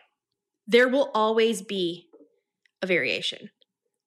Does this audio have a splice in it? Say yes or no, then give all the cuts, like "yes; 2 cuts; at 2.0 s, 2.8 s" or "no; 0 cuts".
no; 0 cuts